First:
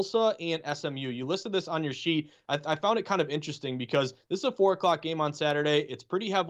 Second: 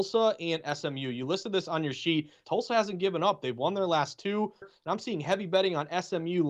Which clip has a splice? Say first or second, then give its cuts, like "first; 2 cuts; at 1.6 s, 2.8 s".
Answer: second; 2 cuts; at 2.4 s, 4.6 s